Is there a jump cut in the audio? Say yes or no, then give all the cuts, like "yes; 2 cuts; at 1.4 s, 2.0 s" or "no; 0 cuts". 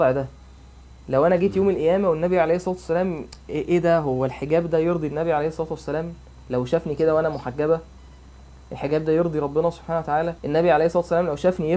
yes; 1 cut; at 10.4 s